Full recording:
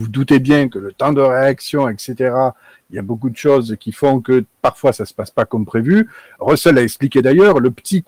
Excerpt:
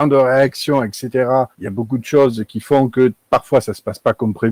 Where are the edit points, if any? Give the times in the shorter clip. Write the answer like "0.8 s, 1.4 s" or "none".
1.5 s